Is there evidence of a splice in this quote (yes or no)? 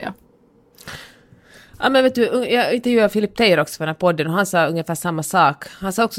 no